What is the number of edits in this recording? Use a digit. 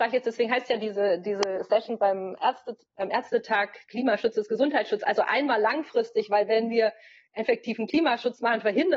1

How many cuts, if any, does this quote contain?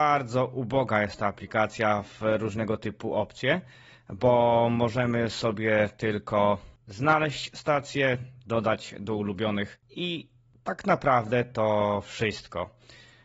0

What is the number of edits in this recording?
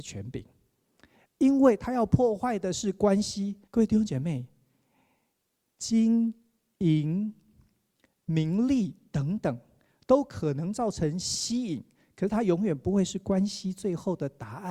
1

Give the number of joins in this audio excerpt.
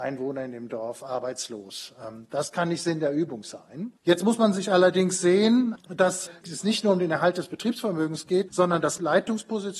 2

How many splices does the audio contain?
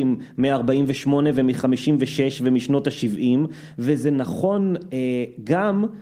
0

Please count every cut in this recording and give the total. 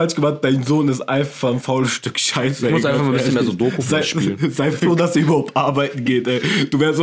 0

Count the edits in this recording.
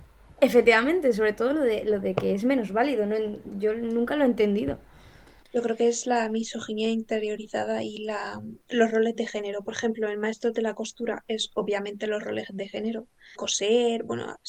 1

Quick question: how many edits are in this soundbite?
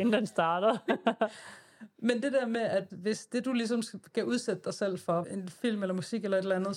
2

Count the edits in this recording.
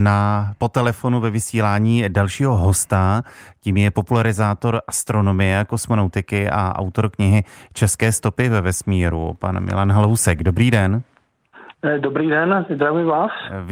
0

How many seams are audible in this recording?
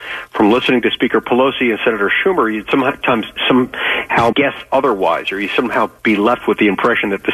1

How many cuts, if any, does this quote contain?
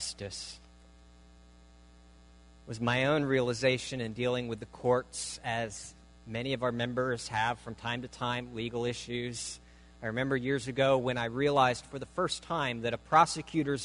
0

